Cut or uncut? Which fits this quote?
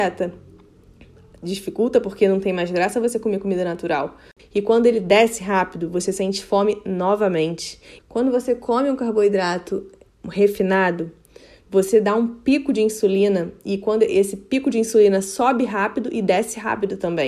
cut